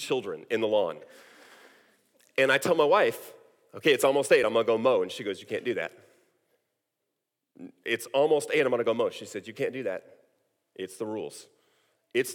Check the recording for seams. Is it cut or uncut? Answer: uncut